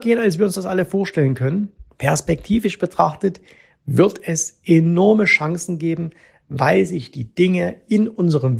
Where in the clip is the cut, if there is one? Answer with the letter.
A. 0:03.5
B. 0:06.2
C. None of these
C